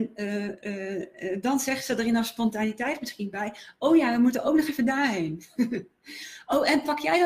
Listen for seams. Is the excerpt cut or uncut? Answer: uncut